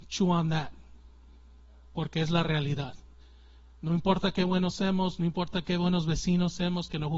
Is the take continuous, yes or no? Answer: yes